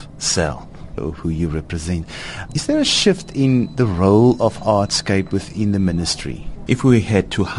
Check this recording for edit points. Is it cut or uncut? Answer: cut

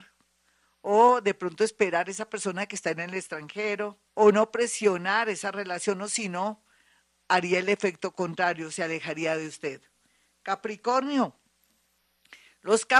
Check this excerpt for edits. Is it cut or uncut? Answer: cut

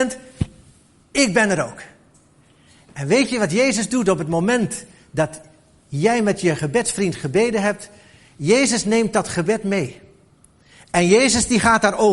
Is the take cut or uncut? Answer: uncut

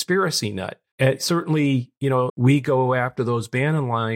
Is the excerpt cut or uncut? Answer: cut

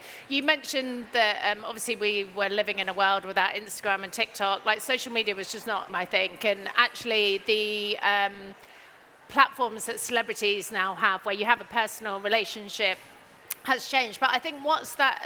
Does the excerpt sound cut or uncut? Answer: cut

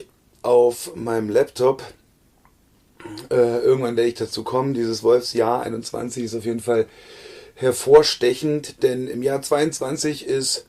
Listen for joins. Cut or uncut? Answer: uncut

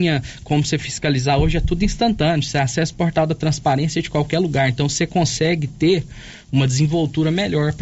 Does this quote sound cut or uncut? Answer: uncut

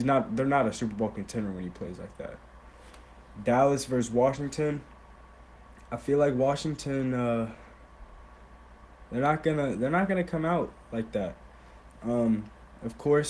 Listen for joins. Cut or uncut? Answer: uncut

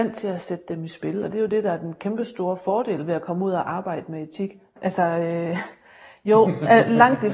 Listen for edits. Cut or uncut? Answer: cut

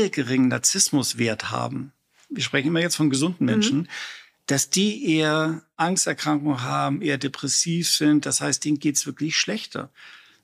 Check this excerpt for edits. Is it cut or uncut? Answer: uncut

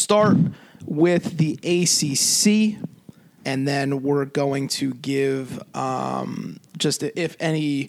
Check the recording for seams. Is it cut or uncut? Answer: cut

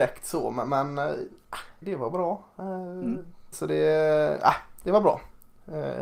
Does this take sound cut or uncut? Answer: cut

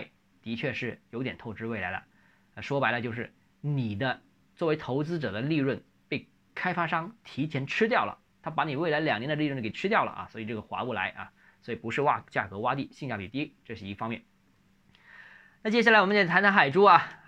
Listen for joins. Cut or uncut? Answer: uncut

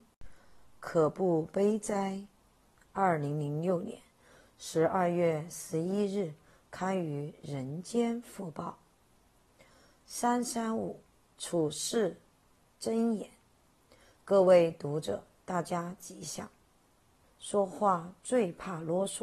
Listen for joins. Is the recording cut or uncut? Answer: cut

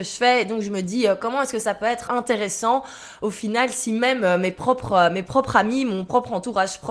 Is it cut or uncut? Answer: cut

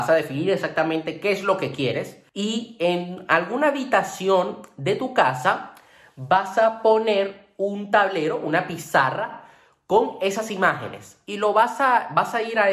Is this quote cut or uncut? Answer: cut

